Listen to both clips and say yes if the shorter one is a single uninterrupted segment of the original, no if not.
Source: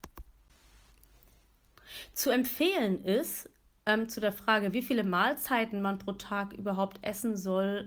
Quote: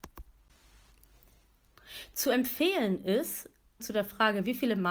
no